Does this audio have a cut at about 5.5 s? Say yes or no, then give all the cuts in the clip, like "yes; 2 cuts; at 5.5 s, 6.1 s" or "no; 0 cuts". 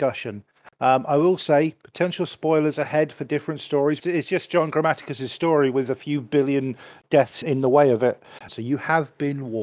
no; 3 cuts; at 4.0 s, 7.4 s, 8.5 s